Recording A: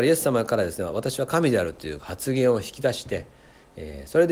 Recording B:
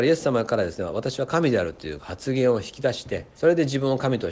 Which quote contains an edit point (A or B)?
B